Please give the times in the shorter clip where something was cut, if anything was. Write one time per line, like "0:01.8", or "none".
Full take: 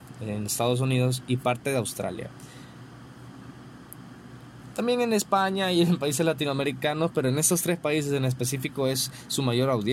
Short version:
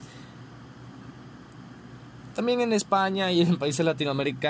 none